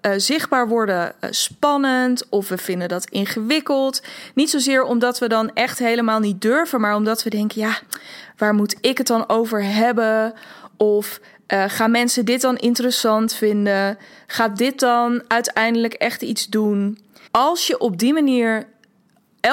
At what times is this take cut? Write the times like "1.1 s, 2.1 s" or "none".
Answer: 17.3 s